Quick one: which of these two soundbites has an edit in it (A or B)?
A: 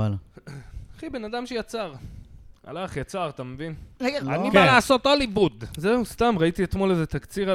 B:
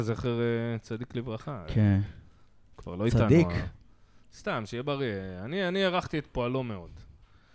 A